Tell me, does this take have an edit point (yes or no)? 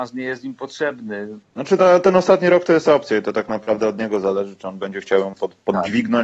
yes